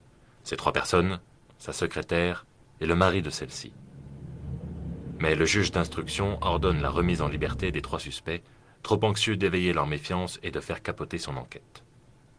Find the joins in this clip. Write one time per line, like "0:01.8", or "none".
0:01.5